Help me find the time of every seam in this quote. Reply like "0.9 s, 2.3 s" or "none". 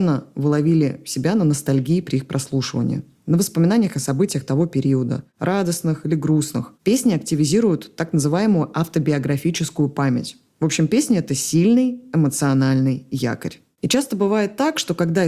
6.7 s